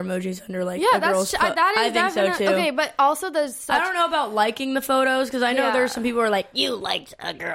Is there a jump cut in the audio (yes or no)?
no